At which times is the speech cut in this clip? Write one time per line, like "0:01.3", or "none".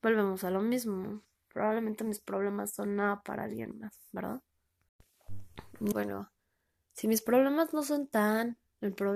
0:05.9